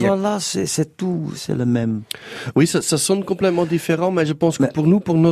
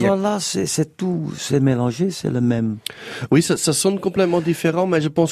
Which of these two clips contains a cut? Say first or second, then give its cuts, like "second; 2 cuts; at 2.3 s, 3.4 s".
first; 1 cut; at 1.4 s